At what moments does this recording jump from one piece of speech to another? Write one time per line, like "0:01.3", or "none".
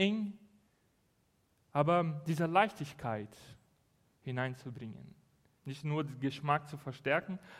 0:05.6